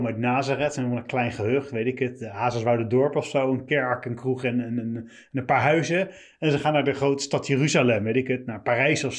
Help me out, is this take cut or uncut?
uncut